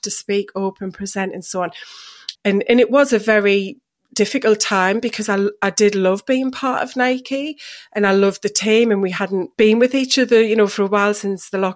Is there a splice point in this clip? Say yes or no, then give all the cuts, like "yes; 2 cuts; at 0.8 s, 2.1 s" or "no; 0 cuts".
yes; 2 cuts; at 2.4 s, 9.5 s